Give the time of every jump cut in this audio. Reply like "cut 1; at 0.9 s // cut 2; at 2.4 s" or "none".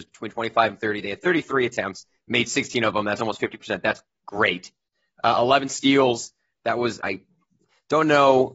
cut 1; at 7.0 s